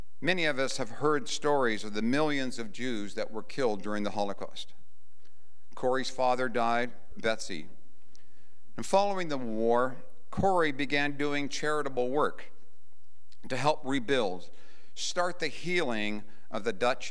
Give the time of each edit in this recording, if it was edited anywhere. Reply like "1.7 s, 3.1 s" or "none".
7.1 s